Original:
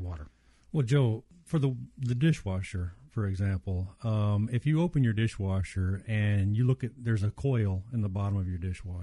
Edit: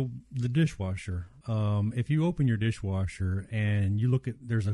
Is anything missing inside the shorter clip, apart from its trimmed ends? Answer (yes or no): yes